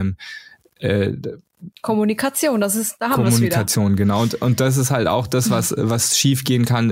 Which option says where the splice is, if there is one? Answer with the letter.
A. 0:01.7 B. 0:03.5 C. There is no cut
A